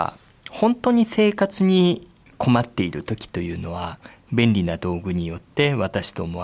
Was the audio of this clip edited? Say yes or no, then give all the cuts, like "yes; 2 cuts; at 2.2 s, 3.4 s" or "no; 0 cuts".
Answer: no; 0 cuts